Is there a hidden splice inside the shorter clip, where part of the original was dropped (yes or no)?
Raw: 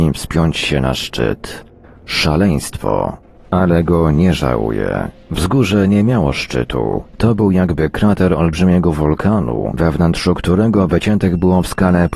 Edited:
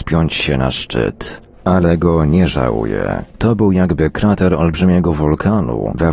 yes